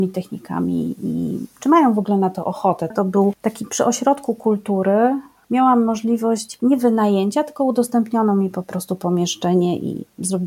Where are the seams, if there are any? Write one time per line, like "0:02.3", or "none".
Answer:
0:02.9